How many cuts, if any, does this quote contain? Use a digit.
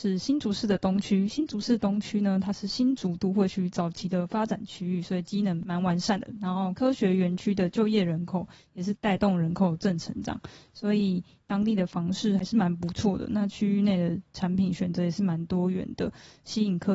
0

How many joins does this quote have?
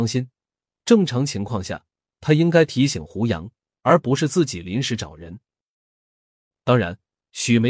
1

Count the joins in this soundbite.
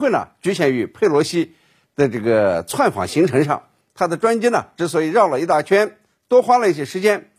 1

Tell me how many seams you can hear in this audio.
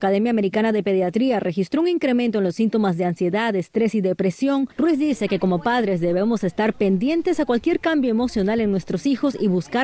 1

